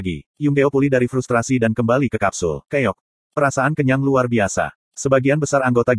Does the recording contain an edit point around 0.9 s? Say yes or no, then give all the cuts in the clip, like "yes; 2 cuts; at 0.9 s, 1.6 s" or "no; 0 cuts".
no; 2 cuts; at 2.7 s, 4.8 s